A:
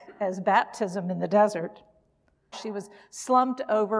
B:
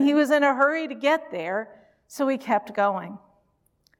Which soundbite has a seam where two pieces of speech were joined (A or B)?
A